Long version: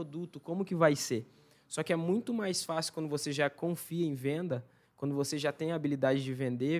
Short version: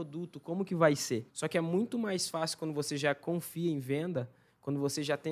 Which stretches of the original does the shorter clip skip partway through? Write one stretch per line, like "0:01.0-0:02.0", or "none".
0:01.3-0:01.6